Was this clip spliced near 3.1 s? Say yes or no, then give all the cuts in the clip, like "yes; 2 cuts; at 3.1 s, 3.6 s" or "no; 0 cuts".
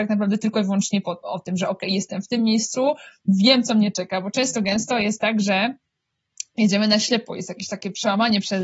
no; 1 cut; at 1.2 s